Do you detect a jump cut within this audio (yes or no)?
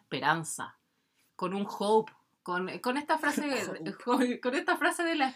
no